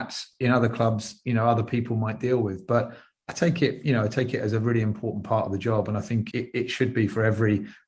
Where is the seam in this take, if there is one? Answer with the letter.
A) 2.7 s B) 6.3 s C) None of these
B